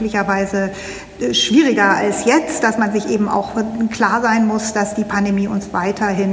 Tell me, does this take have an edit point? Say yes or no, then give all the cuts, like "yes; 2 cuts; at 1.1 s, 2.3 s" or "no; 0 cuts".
no; 0 cuts